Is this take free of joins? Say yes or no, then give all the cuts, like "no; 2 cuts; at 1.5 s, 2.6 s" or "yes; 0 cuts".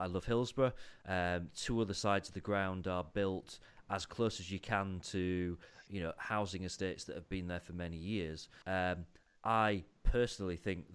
no; 3 cuts; at 1.0 s, 5.9 s, 8.6 s